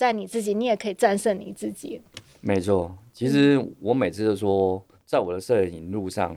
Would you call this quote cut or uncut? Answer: uncut